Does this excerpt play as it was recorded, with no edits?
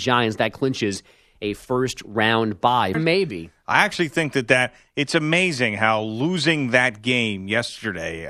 no; 1 cut; at 2.9 s

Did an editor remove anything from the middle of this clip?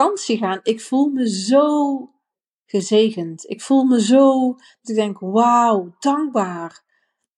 no; 0 cuts

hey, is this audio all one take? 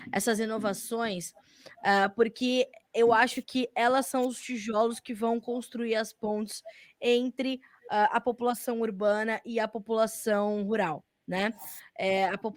yes; 0 cuts

